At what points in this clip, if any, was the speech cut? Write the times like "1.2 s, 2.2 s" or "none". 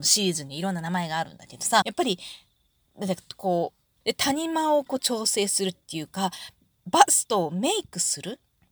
1.8 s, 4.0 s